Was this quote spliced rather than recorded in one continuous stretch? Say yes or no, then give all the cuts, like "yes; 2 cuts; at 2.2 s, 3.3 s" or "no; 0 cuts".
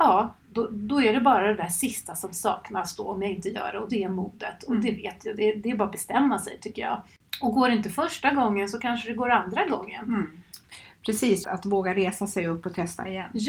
yes; 1 cut; at 11.4 s